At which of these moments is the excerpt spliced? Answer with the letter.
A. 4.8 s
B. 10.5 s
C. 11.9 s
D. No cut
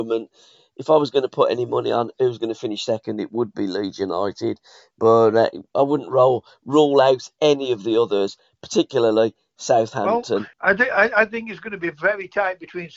B